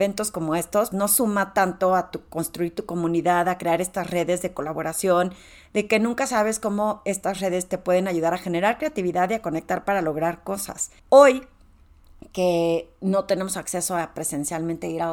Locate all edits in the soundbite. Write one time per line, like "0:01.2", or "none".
0:00.9
0:11.0